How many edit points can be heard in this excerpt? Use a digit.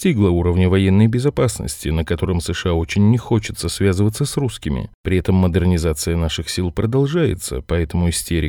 0